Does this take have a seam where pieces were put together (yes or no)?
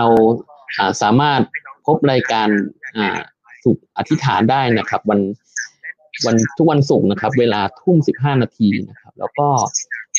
yes